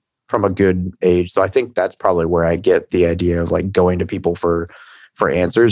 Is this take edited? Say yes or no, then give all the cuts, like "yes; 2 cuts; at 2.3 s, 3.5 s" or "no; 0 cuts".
no; 0 cuts